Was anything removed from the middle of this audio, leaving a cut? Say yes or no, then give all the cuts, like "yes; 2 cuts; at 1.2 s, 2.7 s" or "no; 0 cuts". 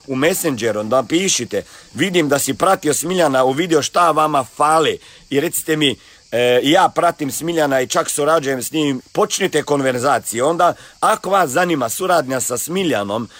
yes; 1 cut; at 9.0 s